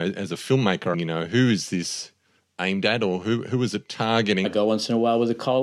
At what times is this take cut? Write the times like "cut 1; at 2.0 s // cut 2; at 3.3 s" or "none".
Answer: cut 1; at 0.9 s // cut 2; at 4.4 s